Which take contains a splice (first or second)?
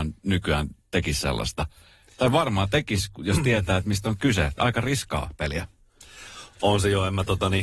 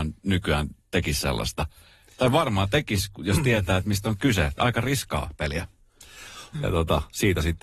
second